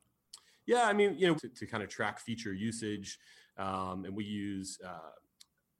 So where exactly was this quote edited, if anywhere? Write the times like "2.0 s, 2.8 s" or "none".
1.4 s

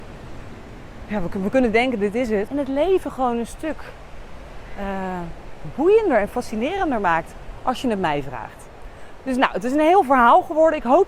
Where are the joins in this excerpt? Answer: 2.5 s

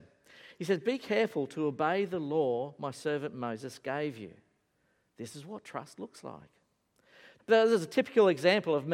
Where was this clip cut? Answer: 7.4 s

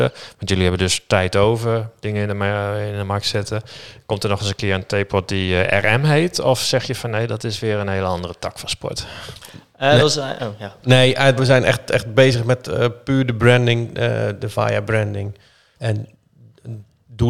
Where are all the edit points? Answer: 11.4 s, 15.7 s

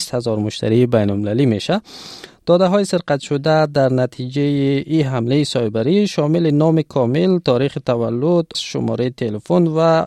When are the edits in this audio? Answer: 8.5 s

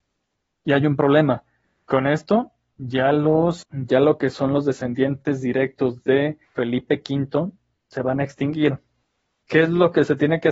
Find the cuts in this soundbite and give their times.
3.6 s, 6.4 s

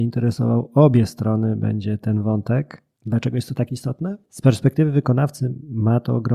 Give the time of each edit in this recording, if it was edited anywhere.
3.0 s, 4.2 s

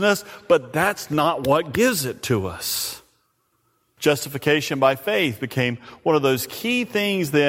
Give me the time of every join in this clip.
4.0 s

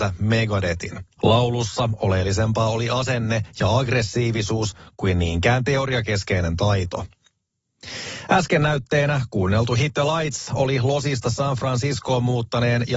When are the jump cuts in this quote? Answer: 1.2 s

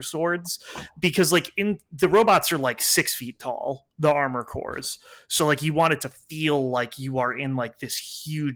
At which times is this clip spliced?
none

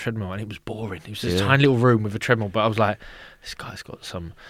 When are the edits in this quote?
none

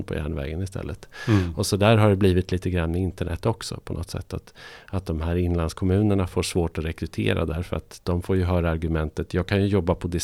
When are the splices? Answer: none

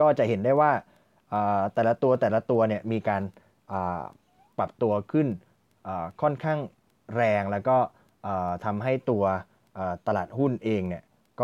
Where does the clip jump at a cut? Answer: none

